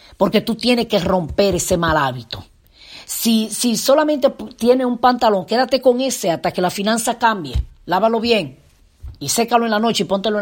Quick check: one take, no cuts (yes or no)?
yes